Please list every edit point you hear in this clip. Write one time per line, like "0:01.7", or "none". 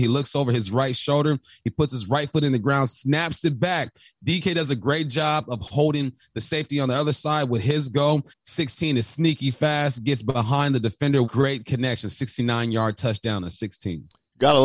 0:08.3
0:11.2

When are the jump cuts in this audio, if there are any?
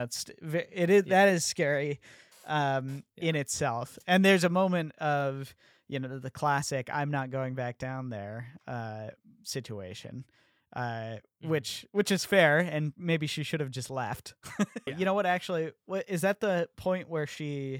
0:14.9

